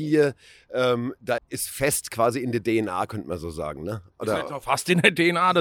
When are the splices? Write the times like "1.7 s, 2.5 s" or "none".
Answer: 1.4 s